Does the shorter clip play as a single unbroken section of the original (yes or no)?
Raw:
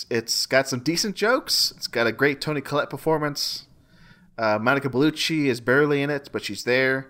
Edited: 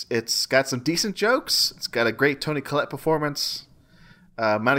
yes